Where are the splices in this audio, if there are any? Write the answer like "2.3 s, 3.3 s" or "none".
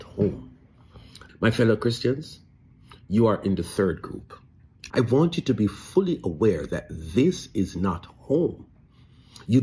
1.3 s, 4.9 s